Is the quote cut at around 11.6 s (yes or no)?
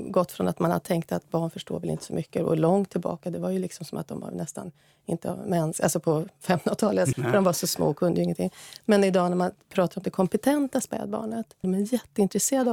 yes